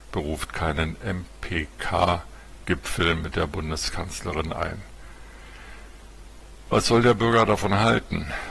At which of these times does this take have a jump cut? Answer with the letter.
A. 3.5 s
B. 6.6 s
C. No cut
C